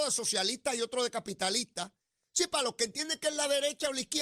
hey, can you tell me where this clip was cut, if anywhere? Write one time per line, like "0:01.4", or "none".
none